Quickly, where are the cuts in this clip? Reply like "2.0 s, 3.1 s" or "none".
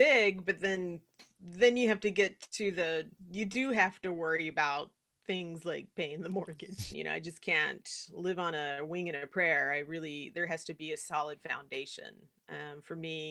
6.9 s